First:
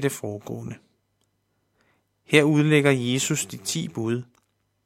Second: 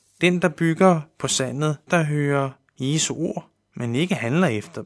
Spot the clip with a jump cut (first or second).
second